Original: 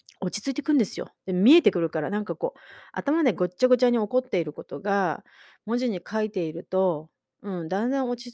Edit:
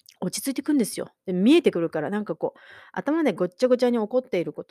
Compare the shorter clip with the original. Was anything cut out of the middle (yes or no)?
no